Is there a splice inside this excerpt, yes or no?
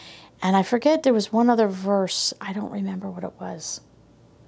no